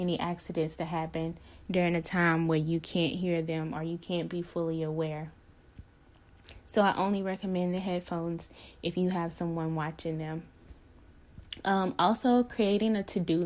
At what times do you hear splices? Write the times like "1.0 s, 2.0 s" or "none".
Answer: none